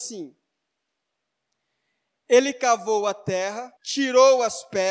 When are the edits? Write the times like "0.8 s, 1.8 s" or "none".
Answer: 3.8 s